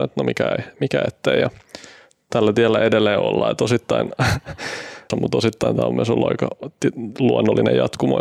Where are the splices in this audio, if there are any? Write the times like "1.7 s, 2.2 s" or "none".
5.1 s